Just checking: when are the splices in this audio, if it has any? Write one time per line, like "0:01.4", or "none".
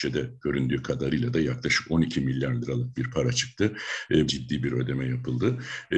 0:04.3